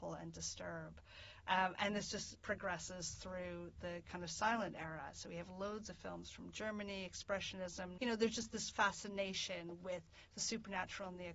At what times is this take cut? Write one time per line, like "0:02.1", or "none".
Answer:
0:08.0